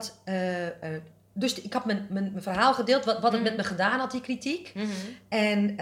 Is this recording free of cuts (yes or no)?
yes